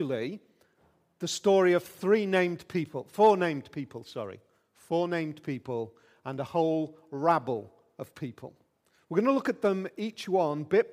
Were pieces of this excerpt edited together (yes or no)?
no